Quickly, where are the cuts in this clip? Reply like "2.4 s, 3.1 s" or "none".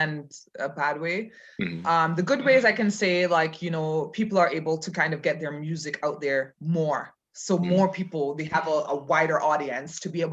none